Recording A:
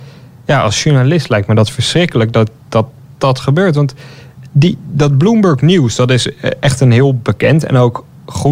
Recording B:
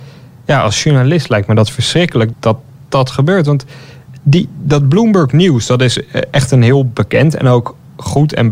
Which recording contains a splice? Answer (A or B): B